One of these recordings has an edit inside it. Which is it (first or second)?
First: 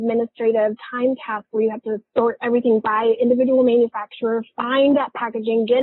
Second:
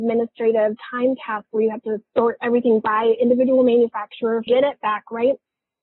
second